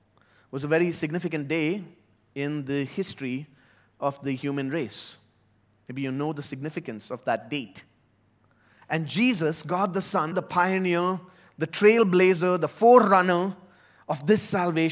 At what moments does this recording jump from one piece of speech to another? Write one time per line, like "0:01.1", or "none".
0:08.8
0:10.3